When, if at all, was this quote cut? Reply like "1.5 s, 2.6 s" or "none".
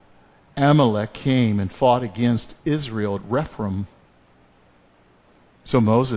none